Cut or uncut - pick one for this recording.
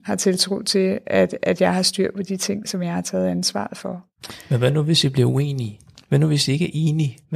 uncut